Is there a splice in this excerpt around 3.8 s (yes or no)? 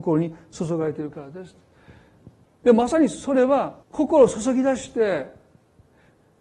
yes